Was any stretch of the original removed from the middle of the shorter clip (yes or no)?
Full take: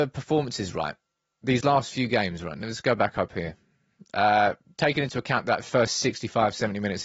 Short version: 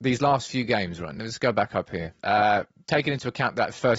yes